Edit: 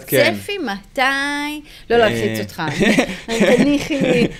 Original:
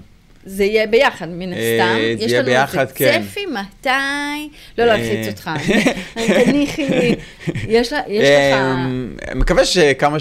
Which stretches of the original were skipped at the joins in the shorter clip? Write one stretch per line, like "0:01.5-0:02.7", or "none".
none